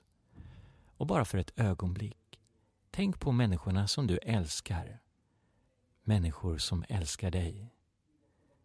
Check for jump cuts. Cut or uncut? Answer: uncut